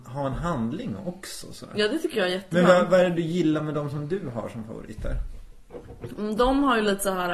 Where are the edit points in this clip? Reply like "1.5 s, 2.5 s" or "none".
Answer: none